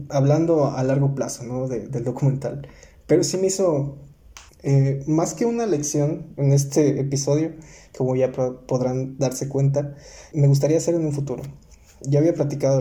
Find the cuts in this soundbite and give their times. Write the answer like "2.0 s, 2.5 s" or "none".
4.5 s, 10.3 s